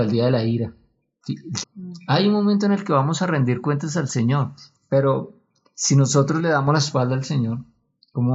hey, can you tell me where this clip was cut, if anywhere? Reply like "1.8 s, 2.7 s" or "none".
1.6 s

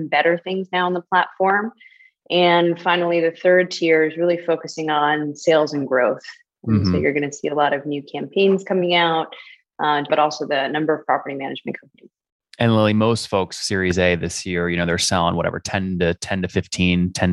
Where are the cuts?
10.1 s

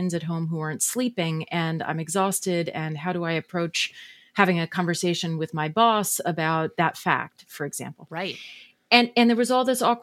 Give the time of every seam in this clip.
6.7 s

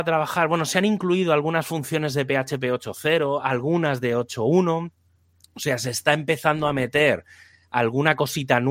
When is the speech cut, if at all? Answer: none

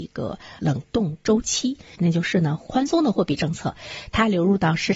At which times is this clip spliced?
1.9 s

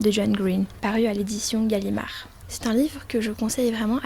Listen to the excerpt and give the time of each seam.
none

